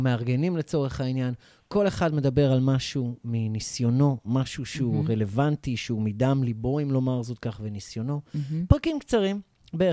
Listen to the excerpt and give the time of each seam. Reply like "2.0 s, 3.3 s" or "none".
none